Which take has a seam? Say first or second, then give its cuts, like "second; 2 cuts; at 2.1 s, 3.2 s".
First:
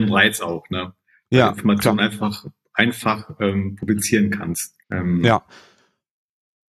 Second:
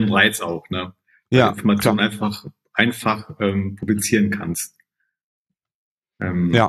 first; 1 cut; at 4.8 s